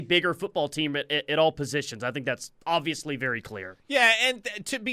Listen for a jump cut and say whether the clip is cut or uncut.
uncut